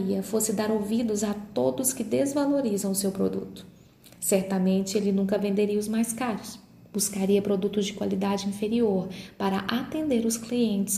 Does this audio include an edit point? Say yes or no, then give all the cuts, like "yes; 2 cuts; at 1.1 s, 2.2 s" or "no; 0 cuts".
no; 0 cuts